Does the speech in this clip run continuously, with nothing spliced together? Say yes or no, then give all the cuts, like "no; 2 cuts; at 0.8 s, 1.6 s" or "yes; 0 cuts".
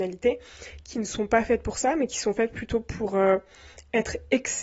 yes; 0 cuts